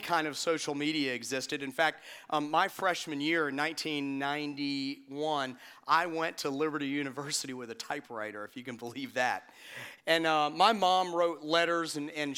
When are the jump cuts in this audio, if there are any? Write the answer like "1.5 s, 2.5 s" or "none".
10.0 s